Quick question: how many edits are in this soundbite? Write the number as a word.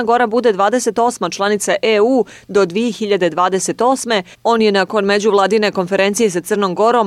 one